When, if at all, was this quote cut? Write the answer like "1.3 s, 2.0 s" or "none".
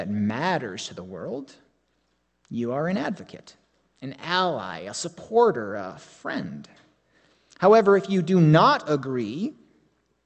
none